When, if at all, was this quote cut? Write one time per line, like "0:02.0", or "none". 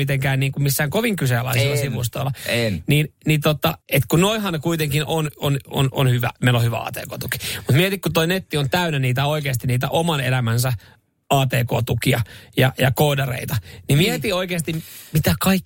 0:03.8